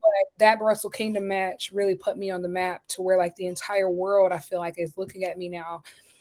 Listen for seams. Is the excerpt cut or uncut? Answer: uncut